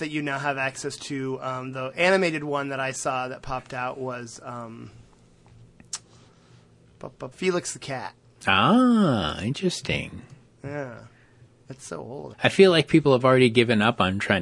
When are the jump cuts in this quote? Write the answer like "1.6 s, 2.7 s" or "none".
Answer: 7.3 s, 12.3 s